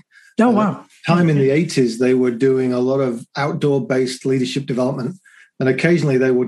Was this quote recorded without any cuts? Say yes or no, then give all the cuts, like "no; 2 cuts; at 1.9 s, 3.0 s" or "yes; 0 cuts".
yes; 0 cuts